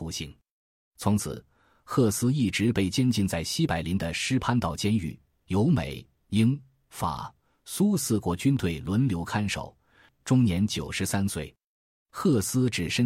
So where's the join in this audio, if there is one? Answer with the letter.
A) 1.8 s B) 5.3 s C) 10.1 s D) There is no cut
C